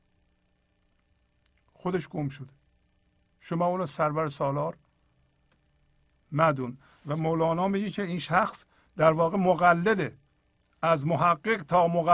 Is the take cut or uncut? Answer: uncut